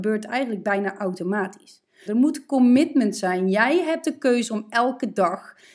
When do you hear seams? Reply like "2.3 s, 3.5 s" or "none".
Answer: 2.1 s